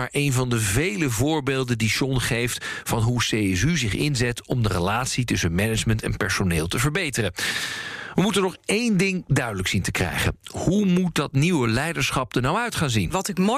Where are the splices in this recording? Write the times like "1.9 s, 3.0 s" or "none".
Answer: none